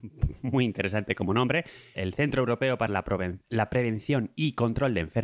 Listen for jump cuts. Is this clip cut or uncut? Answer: cut